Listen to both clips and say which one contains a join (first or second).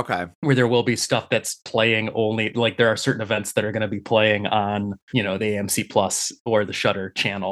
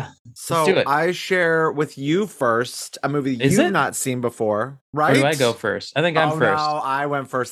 first